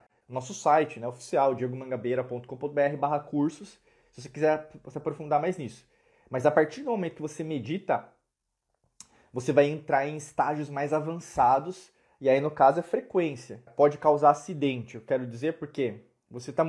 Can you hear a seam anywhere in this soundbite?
yes; 1 cut; at 13.7 s

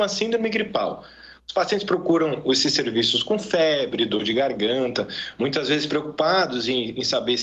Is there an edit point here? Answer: no; 0 cuts

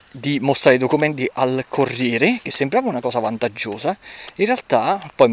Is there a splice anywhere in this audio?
no; 0 cuts

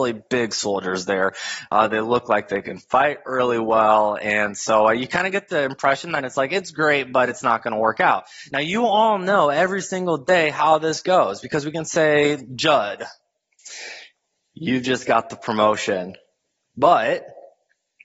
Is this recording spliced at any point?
no; 0 cuts

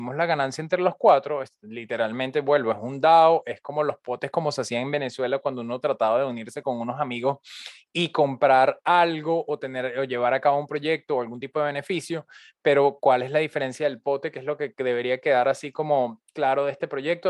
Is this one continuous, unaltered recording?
yes; 0 cuts

